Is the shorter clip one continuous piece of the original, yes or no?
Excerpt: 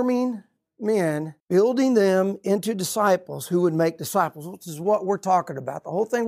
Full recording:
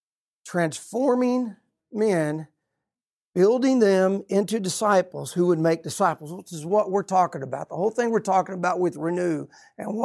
no